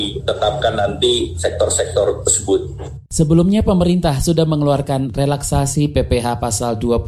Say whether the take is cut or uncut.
cut